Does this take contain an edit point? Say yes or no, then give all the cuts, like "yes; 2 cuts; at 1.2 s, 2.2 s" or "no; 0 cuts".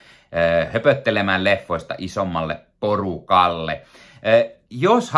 no; 0 cuts